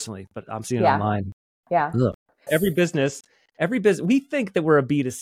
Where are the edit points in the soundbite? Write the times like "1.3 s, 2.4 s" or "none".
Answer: 2.5 s